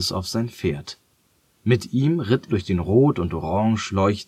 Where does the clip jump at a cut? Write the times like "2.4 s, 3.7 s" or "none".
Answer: 2.5 s